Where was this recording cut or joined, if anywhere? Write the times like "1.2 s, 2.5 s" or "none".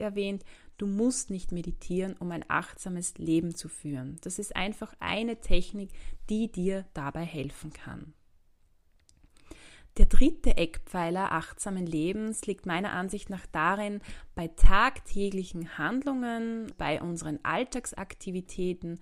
16.7 s